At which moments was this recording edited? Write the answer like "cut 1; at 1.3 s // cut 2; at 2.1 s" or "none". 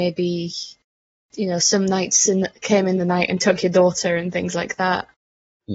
none